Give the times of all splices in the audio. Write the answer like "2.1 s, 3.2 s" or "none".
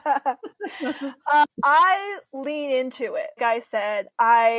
1.5 s, 3.4 s